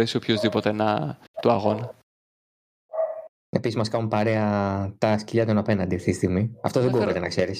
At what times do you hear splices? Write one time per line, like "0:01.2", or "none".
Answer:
0:01.4